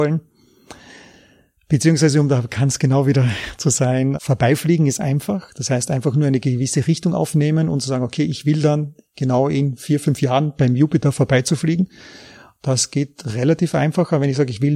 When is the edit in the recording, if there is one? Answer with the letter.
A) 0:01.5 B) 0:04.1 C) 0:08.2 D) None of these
B